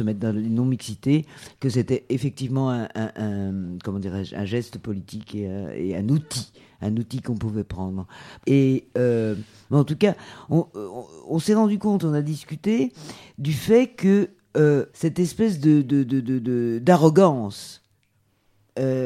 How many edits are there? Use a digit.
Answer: 3